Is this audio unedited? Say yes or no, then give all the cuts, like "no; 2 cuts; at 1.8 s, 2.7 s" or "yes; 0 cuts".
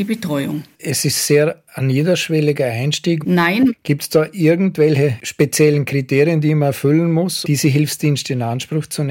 no; 2 cuts; at 3.2 s, 7.4 s